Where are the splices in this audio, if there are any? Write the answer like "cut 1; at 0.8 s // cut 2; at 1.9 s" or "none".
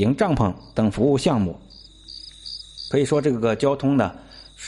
cut 1; at 2.9 s